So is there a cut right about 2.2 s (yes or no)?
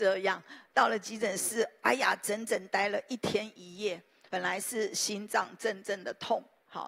no